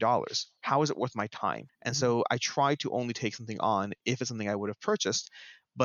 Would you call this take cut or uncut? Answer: cut